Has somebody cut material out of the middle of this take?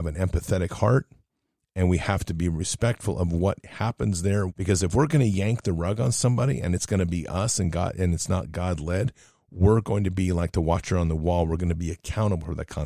yes; 1 cut; at 4.5 s

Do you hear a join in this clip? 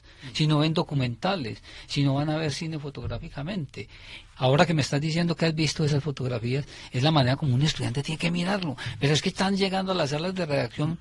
yes; 1 cut; at 4.3 s

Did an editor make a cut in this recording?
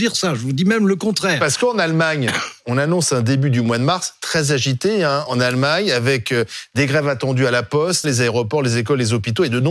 yes; 2 cuts; at 5.3 s, 8.0 s

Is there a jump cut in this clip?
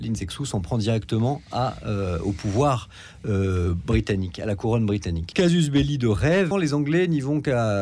yes; 2 cuts; at 5.3 s, 6.5 s

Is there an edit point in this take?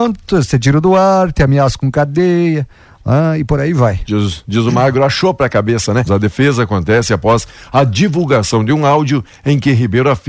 yes; 1 cut; at 6.1 s

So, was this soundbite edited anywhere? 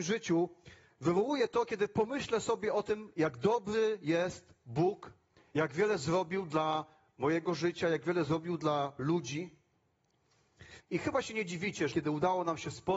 yes; 2 cuts; at 10.8 s, 11.9 s

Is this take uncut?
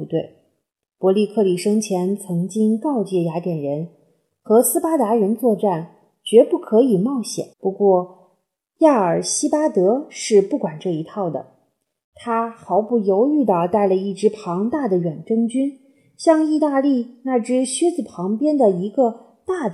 no; 1 cut; at 7.5 s

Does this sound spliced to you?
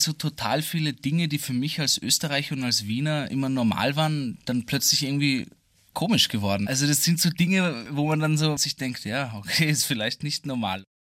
yes; 1 cut; at 6.6 s

